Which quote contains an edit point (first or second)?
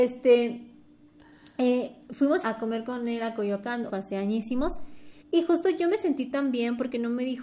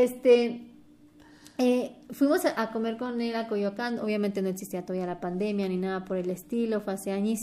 first